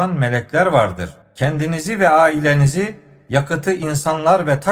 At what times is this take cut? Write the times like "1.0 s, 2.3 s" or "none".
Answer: 1.2 s